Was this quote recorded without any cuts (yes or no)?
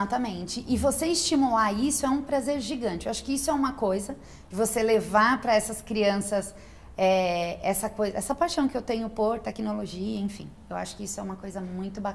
yes